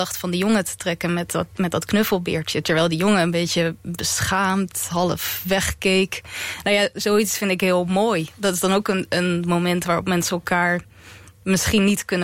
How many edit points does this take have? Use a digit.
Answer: 0